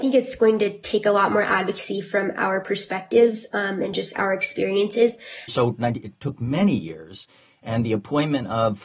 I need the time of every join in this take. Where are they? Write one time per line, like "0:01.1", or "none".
0:05.5